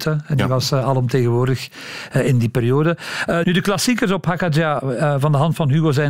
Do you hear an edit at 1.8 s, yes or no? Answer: no